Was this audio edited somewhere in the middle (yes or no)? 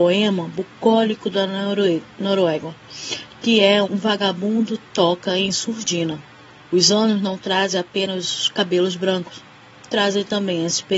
yes